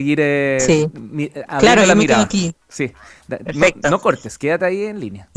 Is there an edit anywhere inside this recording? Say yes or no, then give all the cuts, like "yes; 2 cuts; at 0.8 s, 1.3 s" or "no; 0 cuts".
no; 0 cuts